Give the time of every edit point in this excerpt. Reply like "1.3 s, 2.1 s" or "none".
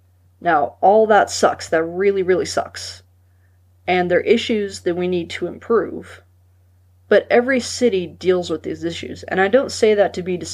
none